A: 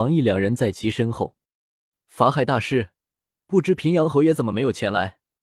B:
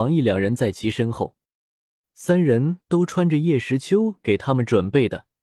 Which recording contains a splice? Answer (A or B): A